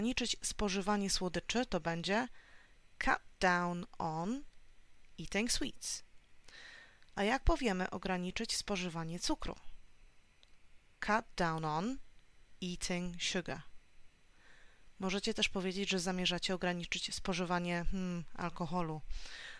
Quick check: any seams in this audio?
no; 0 cuts

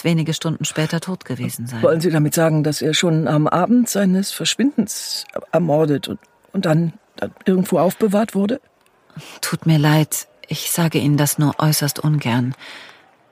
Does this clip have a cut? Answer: no; 0 cuts

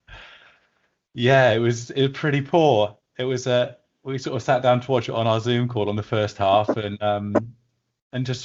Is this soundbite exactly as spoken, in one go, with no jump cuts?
yes; 0 cuts

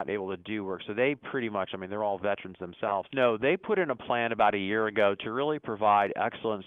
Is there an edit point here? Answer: yes; 1 cut; at 3.1 s

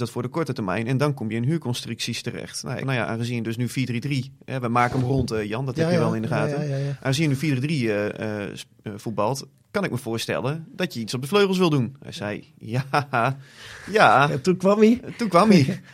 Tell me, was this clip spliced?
yes; 1 cut; at 2.8 s

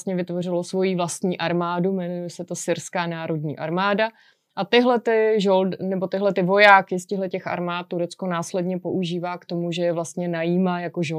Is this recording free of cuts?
yes; 0 cuts

